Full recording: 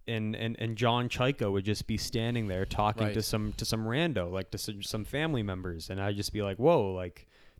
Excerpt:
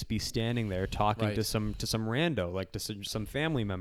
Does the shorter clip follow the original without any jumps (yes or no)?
yes